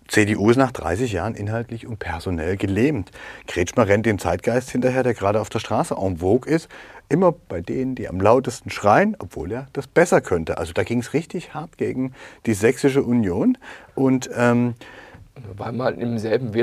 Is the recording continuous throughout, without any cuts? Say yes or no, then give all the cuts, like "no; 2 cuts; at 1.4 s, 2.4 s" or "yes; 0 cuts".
yes; 0 cuts